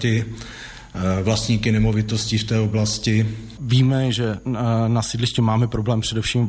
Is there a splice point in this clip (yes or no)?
yes